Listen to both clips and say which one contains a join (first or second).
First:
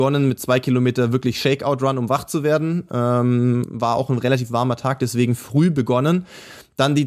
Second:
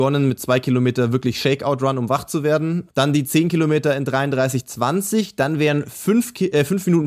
second